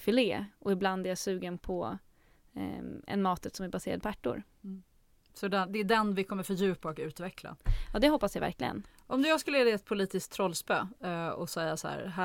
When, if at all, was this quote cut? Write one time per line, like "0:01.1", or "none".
none